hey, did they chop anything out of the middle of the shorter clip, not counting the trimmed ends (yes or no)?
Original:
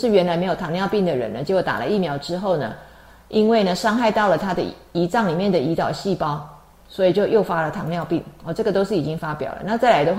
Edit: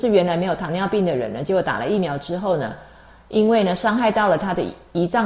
no